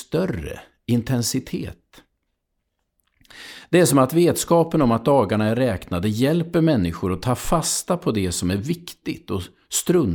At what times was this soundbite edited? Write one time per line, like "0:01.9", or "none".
none